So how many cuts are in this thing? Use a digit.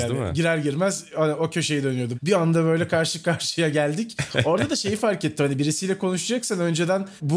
1